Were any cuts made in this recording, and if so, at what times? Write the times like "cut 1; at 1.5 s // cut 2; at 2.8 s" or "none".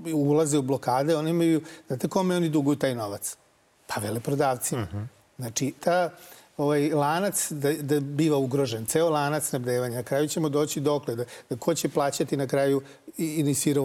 cut 1; at 5.8 s